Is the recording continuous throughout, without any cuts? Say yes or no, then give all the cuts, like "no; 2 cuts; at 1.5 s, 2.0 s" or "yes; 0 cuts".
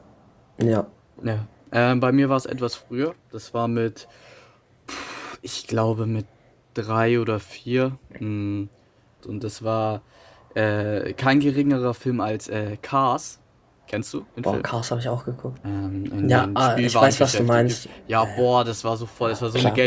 no; 3 cuts; at 9.2 s, 14.3 s, 15.6 s